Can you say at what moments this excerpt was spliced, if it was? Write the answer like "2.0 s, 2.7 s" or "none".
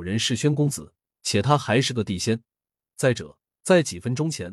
none